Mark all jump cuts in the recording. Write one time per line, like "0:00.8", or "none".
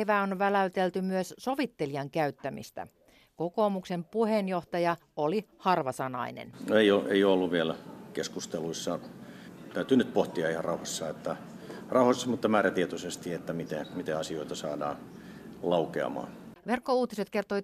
0:05.0